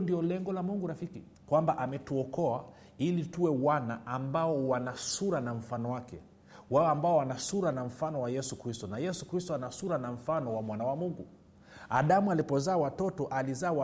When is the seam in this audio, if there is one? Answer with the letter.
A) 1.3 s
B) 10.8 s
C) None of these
A